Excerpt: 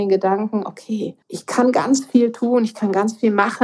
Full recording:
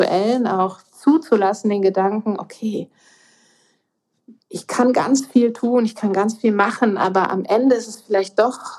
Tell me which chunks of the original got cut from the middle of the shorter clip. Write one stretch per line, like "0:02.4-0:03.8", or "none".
0:02.9-0:04.4